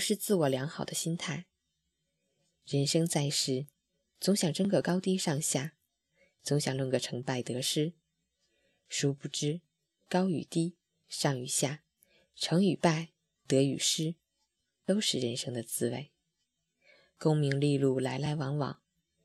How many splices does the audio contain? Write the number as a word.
zero